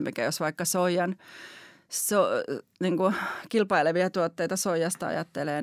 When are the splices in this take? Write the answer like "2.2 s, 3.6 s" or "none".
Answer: none

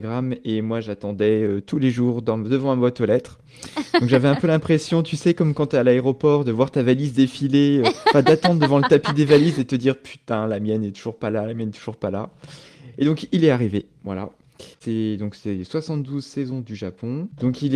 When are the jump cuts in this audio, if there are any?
14.7 s

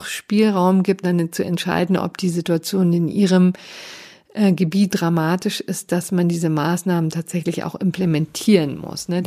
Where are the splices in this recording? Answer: 1.0 s, 4.9 s

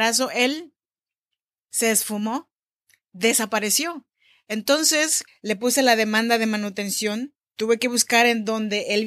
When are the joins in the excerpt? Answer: 5.3 s, 7.4 s

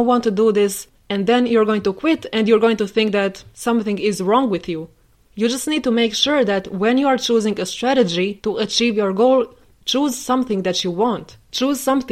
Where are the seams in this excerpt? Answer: 5.3 s

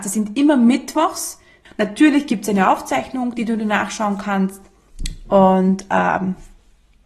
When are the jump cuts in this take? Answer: 1.7 s

